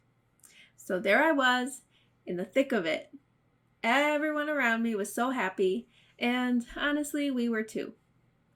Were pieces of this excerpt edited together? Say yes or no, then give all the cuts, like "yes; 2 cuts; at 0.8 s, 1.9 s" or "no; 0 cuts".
no; 0 cuts